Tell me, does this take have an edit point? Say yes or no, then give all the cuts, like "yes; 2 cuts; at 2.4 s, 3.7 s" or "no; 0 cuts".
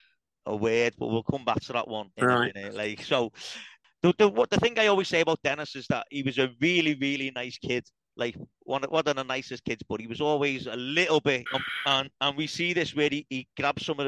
yes; 1 cut; at 11.5 s